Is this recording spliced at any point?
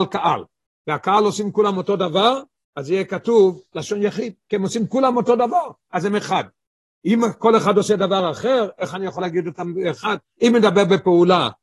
yes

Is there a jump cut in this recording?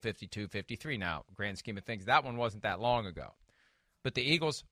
no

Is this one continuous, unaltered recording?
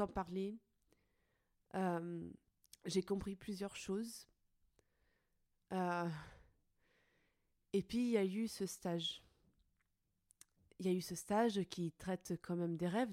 yes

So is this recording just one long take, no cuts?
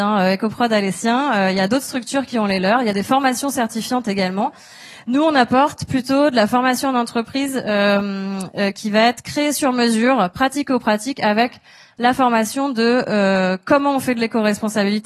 yes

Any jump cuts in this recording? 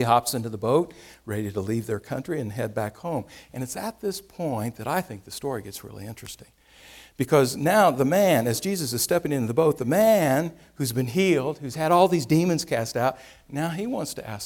no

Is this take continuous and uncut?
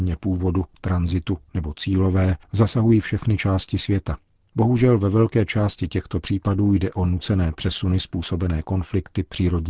no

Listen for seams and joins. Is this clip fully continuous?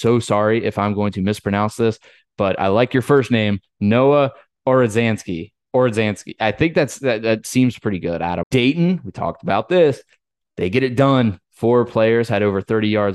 no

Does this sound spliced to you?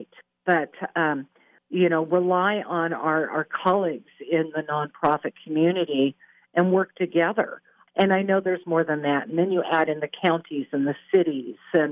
yes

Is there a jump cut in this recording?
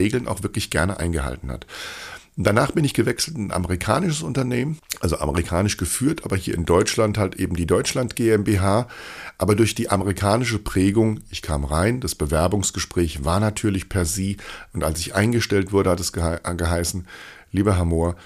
no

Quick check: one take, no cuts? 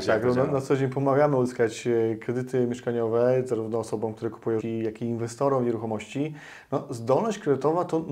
no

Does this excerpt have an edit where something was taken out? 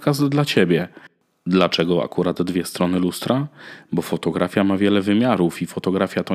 no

